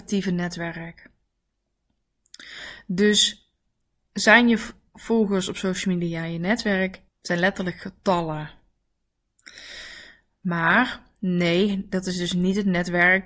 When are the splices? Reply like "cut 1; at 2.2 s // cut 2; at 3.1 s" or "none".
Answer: cut 1; at 7.1 s